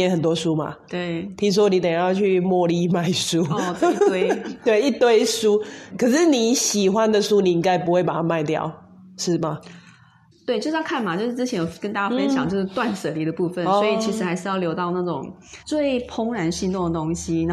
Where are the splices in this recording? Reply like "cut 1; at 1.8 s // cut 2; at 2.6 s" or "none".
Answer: cut 1; at 5.9 s // cut 2; at 10.3 s // cut 3; at 15.6 s